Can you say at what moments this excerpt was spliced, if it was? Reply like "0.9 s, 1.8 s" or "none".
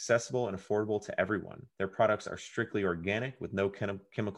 1.7 s